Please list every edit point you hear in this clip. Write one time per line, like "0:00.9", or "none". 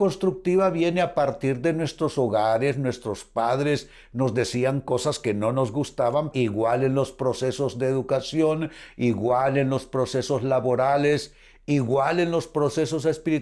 0:06.3